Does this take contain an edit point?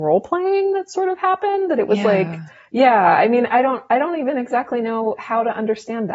no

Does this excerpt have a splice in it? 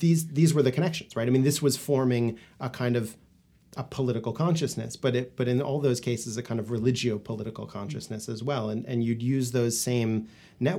no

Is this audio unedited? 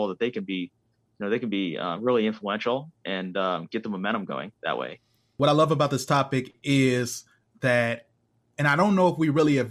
yes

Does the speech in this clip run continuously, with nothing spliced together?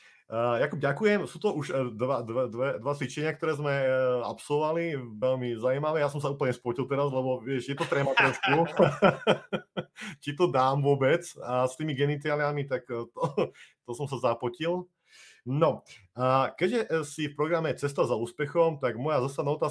yes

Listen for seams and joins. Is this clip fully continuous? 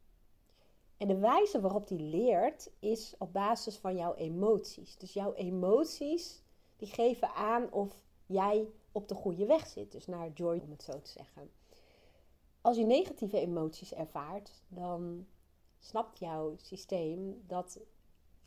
no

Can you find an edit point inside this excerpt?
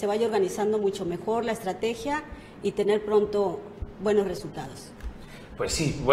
no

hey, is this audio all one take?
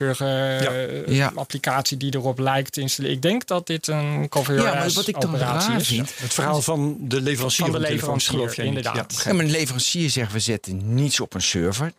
yes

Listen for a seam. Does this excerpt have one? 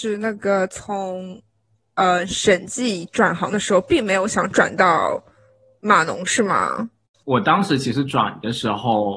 yes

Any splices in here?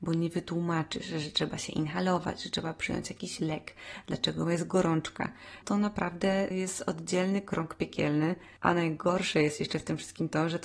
no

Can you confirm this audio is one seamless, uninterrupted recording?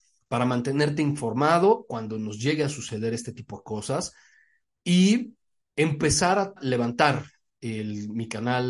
no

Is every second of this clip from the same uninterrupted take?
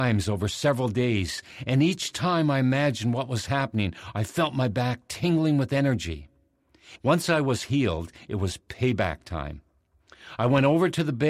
no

